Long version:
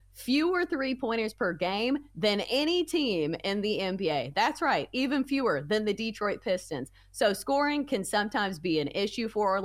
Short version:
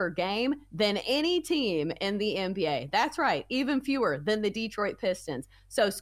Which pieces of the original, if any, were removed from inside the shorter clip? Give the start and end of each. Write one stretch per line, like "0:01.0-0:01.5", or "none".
none